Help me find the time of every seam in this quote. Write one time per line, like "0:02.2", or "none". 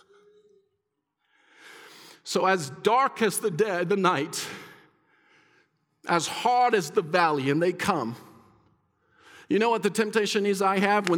none